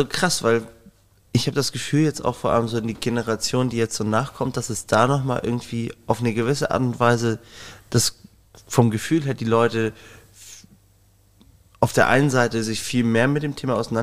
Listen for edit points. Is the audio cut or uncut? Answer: uncut